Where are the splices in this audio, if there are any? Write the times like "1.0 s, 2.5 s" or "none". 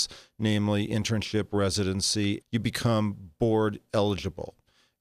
2.4 s